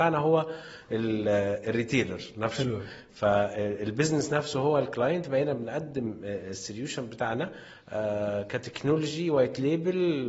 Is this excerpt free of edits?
yes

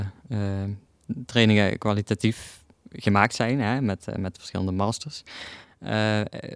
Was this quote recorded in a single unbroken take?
yes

